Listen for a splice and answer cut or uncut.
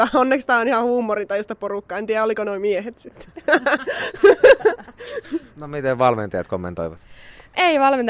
uncut